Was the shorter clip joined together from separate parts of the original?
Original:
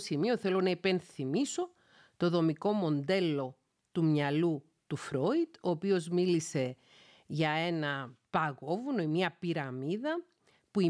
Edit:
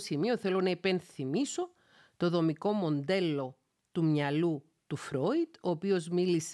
no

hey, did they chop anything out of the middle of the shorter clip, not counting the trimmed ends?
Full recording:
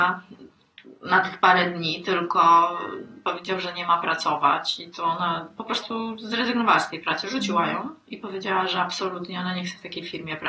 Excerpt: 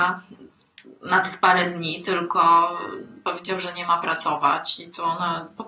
no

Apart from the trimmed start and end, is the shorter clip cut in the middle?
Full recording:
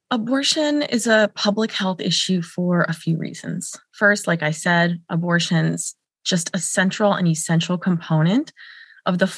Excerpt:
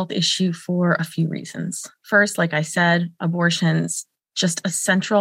no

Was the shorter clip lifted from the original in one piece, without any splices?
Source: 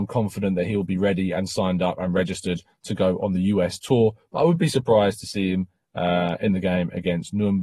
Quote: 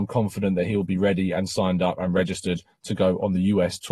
yes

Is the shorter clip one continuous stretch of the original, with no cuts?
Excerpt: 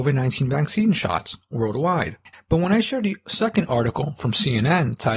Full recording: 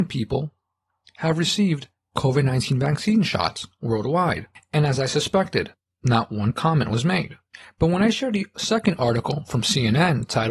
no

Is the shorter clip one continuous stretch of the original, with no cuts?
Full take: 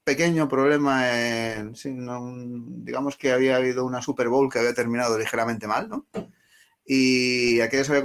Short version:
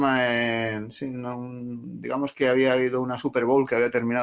yes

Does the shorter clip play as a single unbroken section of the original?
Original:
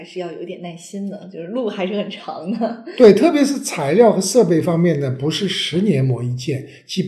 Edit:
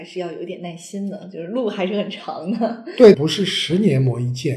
no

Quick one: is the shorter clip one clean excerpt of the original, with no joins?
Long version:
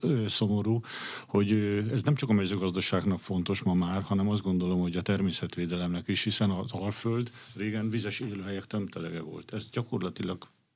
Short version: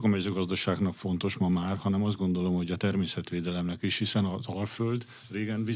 yes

